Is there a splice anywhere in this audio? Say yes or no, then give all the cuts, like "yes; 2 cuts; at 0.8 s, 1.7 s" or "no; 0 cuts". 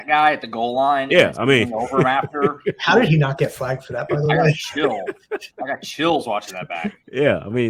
no; 0 cuts